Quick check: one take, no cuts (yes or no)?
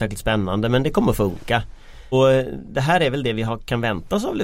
no